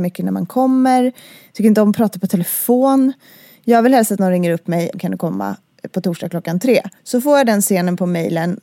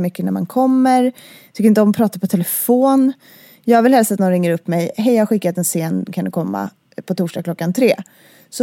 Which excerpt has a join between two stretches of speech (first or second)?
first